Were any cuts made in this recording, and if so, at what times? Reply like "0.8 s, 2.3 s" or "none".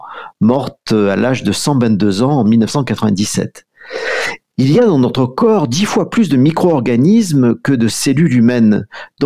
4.5 s